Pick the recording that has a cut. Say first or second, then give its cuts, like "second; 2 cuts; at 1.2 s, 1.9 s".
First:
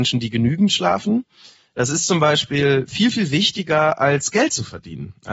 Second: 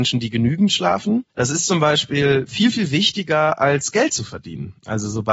second; 1 cut; at 1.3 s